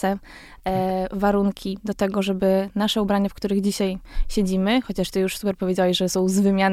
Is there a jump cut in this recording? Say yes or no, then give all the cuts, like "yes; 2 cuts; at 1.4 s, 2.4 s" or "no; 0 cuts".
no; 0 cuts